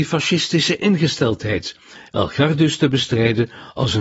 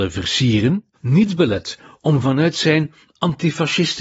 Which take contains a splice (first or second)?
second